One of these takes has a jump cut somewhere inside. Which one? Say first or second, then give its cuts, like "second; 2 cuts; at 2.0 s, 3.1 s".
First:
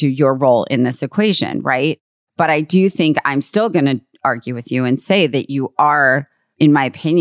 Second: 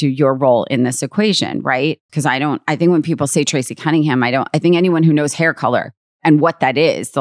second; 1 cut; at 2.1 s